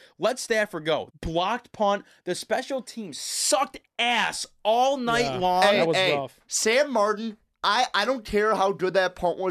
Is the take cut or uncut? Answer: cut